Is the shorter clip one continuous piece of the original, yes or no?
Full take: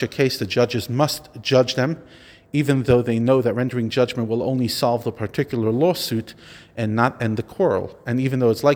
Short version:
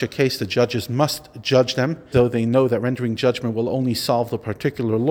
no